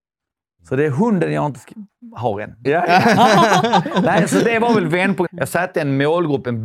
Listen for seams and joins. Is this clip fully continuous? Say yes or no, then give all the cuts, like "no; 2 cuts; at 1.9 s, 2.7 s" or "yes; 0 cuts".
no; 2 cuts; at 2.7 s, 5.3 s